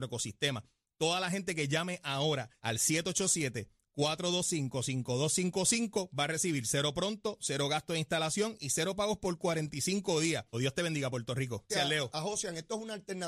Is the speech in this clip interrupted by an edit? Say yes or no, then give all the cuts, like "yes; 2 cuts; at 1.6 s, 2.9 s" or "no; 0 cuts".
yes; 3 cuts; at 2.6 s, 10.5 s, 11.7 s